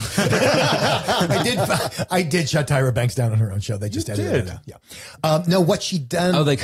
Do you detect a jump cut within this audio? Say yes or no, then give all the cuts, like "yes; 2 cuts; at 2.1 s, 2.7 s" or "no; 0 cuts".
no; 0 cuts